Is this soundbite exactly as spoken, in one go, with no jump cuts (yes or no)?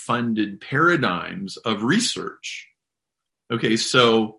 yes